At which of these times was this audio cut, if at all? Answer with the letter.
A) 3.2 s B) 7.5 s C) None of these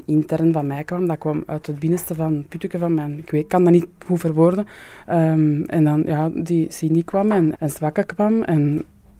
B